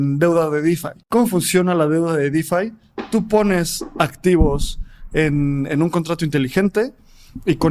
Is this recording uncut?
no; 1 cut; at 1.0 s

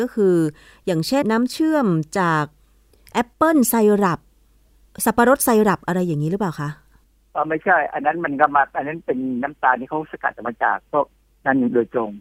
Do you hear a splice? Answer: yes; 1 cut; at 1.2 s

